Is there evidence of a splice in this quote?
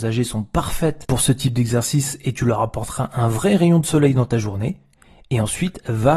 no; 0 cuts

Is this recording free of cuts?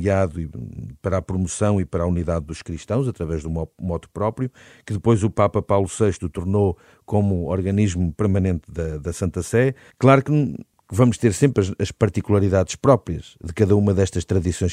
no; 1 cut; at 9.9 s

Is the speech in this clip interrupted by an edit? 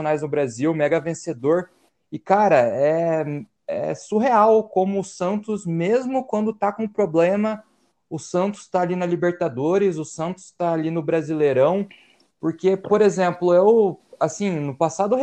no; 0 cuts

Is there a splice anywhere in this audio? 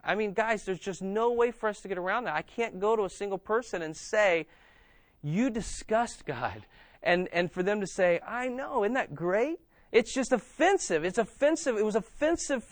no; 0 cuts

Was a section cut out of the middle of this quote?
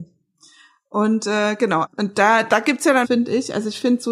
yes; 2 cuts; at 1.8 s, 3.0 s

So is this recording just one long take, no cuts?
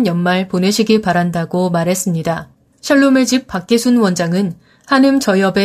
yes; 0 cuts

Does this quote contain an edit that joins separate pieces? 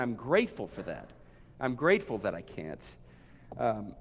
no; 0 cuts

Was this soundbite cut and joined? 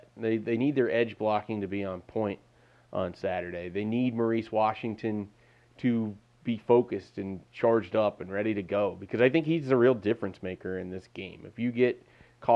no; 0 cuts

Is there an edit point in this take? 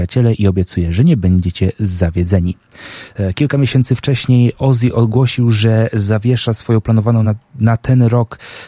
no; 0 cuts

